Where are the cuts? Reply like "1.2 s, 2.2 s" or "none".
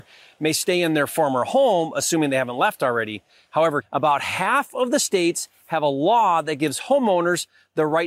3.8 s